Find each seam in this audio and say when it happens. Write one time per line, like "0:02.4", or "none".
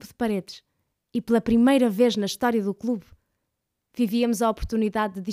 none